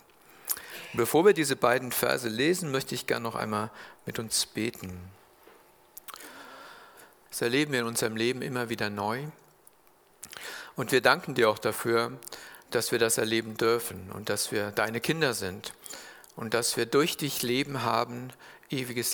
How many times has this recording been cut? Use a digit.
1